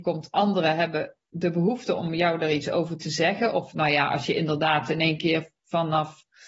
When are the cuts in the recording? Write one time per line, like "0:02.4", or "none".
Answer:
none